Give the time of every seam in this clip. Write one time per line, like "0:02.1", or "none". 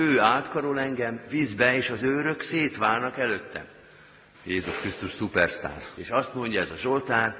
0:04.3
0:06.0